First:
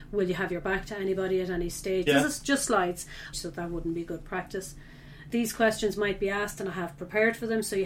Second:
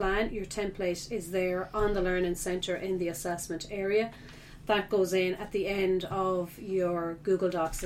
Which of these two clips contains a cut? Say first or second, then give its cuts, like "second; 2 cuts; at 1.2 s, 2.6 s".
first; 2 cuts; at 2.1 s, 3.3 s